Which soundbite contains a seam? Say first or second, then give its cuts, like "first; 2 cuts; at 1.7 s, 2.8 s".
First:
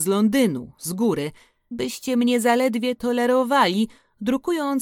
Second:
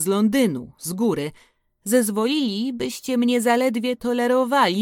first; 1 cut; at 1.7 s